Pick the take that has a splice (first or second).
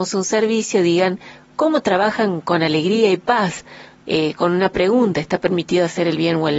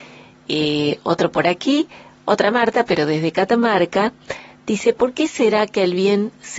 first